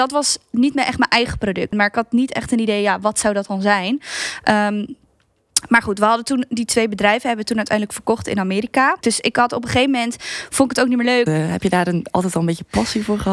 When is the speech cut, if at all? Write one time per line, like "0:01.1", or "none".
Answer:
0:01.7
0:09.0
0:11.3